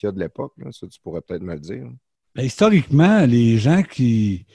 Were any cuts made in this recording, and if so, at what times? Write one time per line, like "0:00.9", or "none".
none